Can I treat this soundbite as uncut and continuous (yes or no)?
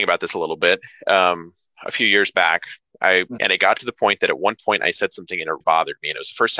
no